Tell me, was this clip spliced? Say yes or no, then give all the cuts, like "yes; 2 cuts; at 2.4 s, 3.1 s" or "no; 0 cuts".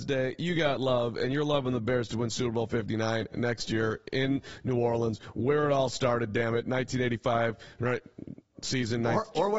no; 0 cuts